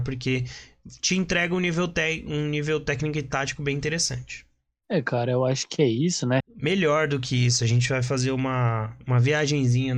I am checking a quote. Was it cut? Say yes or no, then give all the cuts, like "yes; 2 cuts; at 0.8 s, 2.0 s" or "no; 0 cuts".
yes; 1 cut; at 6.4 s